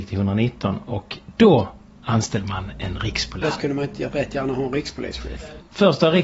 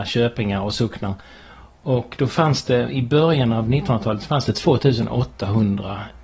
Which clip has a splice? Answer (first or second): first